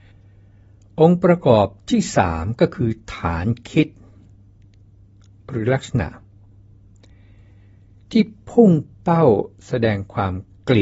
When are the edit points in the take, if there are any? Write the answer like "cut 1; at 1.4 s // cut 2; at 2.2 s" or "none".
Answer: none